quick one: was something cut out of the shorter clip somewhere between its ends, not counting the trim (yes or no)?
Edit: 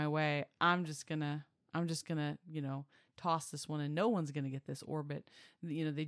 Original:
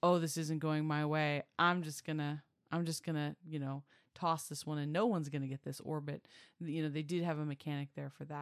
no